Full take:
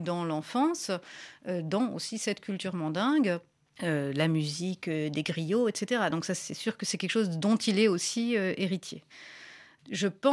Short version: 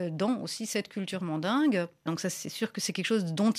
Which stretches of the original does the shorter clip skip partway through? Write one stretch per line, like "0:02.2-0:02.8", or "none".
0:03.6-0:06.1